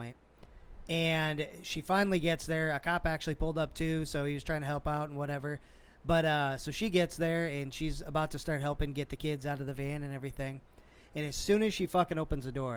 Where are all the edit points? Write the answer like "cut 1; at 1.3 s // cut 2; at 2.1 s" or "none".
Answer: none